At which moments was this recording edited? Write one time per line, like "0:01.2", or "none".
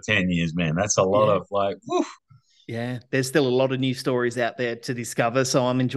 none